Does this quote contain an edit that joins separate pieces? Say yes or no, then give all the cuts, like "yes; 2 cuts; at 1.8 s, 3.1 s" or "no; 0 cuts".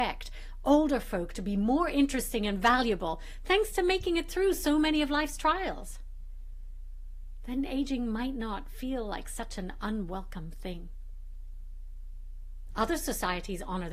no; 0 cuts